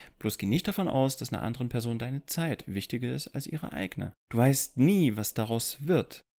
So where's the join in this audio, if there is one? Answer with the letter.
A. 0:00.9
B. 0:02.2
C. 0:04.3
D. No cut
C